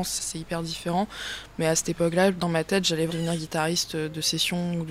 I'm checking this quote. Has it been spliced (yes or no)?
yes